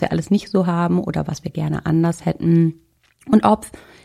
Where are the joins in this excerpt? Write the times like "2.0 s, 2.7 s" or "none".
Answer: none